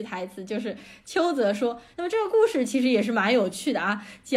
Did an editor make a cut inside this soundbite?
yes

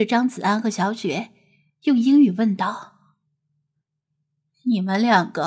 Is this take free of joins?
yes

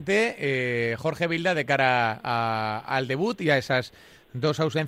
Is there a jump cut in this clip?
no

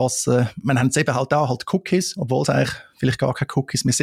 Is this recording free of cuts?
yes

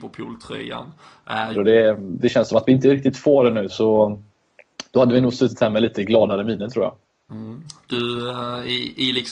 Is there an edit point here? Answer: yes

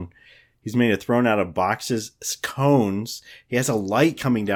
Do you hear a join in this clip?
no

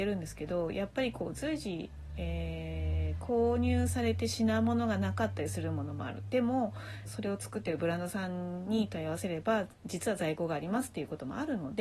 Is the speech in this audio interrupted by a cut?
yes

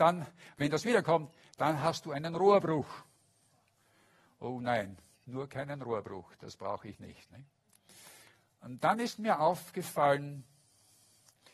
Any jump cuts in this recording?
no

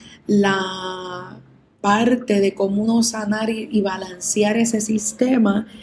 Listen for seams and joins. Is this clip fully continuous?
yes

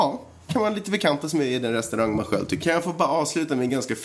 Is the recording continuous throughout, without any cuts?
no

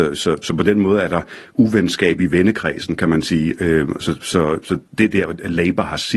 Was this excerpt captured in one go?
yes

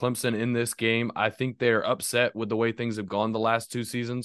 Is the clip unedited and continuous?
yes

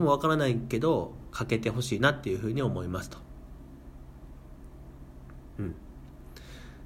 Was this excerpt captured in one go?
yes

